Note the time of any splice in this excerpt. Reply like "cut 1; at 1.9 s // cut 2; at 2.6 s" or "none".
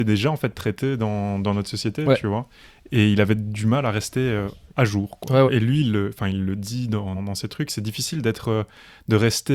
cut 1; at 5.5 s // cut 2; at 7.1 s

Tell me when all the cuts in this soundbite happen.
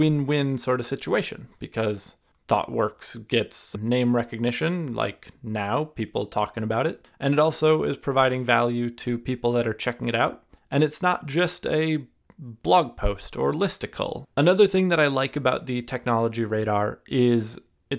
none

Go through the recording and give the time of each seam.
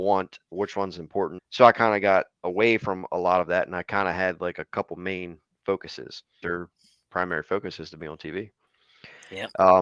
cut 1; at 1.4 s // cut 2; at 6.4 s

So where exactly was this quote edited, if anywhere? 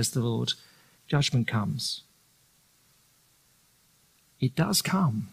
cut 1; at 0.9 s

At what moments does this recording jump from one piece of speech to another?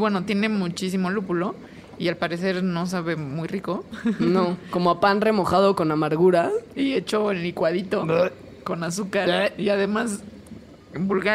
none

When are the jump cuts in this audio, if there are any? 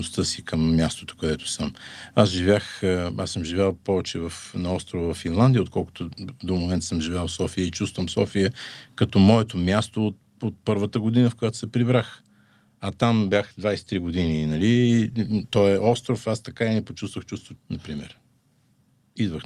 cut 1; at 17.6 s

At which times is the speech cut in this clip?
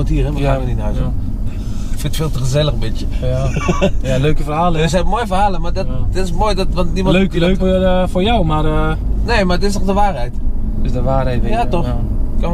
cut 1; at 7.6 s

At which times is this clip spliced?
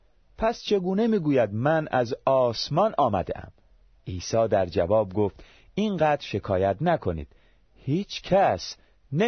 none

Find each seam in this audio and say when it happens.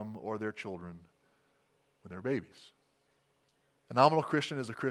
cut 1; at 3.8 s

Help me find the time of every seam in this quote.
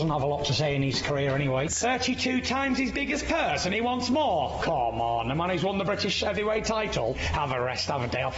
cut 1; at 1.7 s

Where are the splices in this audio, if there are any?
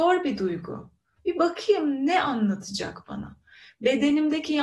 cut 1; at 1.2 s

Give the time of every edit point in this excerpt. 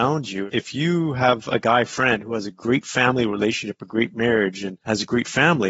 none

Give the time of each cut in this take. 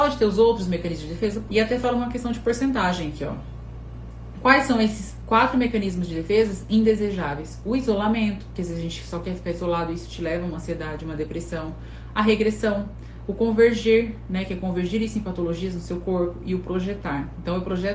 cut 1; at 1.5 s

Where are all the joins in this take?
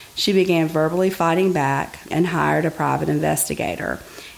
cut 1; at 2.1 s

